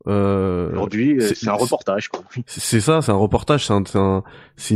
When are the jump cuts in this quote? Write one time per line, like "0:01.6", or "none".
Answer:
none